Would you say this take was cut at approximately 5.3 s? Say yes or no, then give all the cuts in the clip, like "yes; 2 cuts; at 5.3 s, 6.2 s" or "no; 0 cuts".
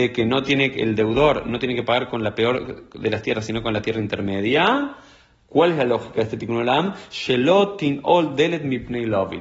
no; 0 cuts